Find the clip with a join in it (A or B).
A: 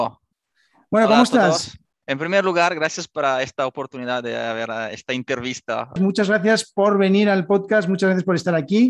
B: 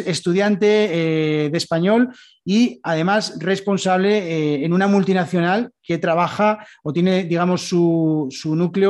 A